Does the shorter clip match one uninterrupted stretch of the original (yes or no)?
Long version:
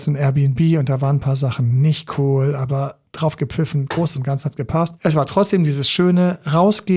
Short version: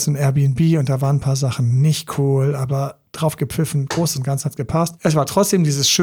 yes